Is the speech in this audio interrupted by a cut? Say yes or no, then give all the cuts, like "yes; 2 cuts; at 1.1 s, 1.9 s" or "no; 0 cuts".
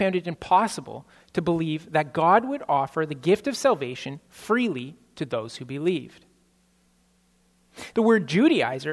yes; 1 cut; at 7.9 s